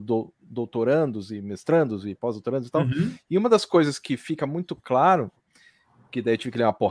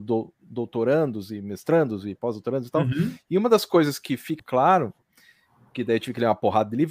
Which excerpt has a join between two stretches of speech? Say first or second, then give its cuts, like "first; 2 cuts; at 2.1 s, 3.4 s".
second; 1 cut; at 4.4 s